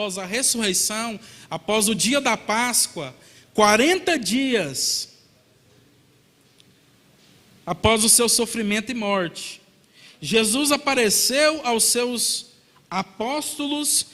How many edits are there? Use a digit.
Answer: 0